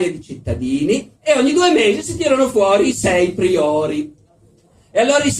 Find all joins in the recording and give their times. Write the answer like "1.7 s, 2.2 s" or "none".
1.2 s